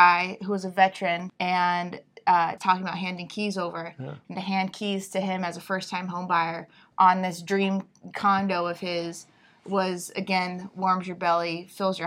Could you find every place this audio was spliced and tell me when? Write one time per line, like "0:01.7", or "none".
0:01.3
0:02.6